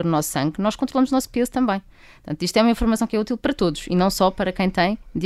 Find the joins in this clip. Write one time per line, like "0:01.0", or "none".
none